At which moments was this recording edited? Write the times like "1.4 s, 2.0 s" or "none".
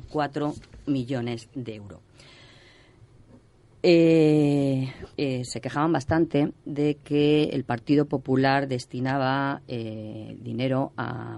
5.2 s